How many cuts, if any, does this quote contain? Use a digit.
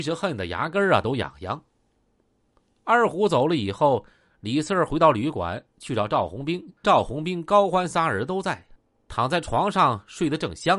1